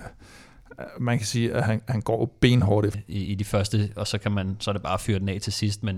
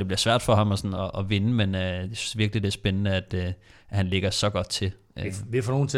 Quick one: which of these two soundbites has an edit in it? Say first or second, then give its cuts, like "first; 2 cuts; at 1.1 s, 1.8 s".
first; 1 cut; at 2.9 s